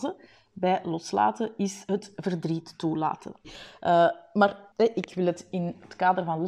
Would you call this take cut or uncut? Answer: cut